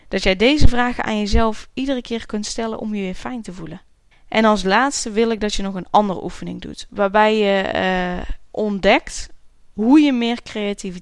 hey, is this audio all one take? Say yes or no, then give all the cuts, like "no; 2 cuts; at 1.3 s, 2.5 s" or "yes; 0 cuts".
no; 1 cut; at 4.1 s